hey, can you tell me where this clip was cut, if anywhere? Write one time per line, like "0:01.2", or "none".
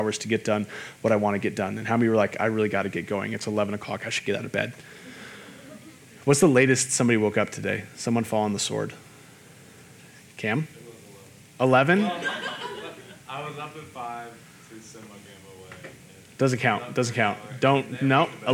none